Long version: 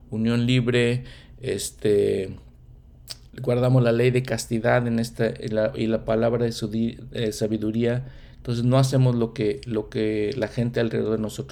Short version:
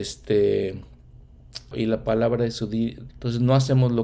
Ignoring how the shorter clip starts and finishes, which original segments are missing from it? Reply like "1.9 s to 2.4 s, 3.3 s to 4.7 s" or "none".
3.3 s to 5.7 s, 7.1 s to 8.3 s